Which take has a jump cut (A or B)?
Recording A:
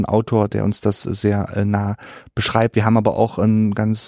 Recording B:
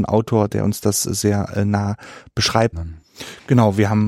B